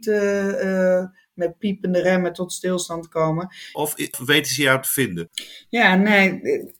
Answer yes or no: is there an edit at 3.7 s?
yes